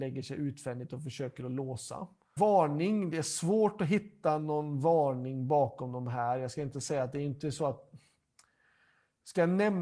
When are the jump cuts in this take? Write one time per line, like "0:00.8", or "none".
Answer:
0:02.4